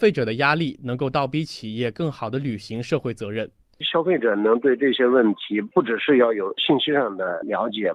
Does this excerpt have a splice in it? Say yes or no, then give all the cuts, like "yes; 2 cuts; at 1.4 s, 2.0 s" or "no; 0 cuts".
no; 0 cuts